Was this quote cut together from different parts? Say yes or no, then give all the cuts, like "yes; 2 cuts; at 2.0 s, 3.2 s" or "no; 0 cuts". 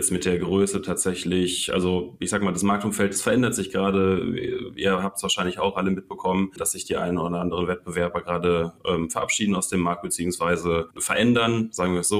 no; 0 cuts